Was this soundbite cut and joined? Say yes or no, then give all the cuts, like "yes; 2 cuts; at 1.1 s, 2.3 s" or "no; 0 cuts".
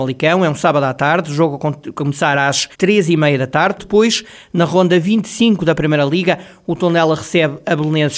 yes; 2 cuts; at 2.7 s, 3.8 s